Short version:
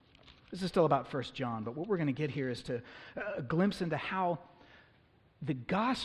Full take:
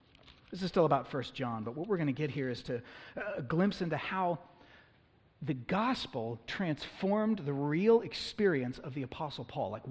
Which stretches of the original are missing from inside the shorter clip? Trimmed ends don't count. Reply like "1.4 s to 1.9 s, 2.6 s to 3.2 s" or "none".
none